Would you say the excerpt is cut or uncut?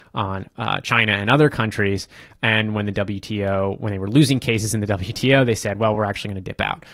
uncut